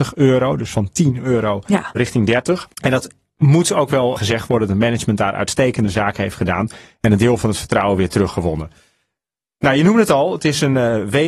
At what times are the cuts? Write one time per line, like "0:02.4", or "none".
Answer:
0:04.2